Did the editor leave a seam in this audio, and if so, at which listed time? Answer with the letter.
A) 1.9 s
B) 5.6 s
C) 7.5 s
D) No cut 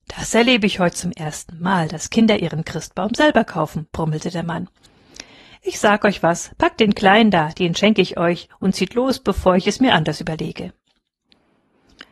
D